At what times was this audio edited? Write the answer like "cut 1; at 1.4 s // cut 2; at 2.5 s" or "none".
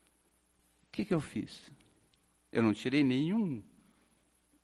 none